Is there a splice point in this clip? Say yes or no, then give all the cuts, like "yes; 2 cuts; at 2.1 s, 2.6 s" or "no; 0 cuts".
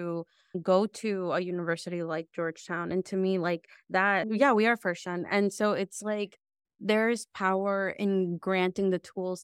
yes; 1 cut; at 4.2 s